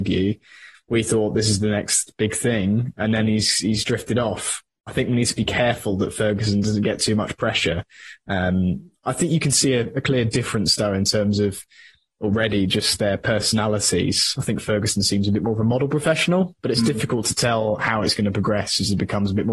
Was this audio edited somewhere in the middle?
no; 0 cuts

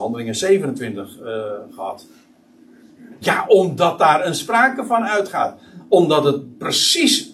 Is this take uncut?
no; 1 cut; at 3.2 s

